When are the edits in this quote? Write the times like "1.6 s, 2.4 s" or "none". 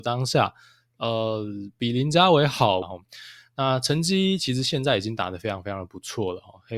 2.8 s